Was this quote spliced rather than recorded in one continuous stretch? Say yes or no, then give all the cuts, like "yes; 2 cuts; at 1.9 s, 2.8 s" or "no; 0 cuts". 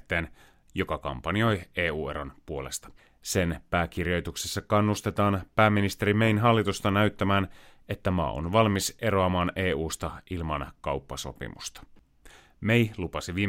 no; 0 cuts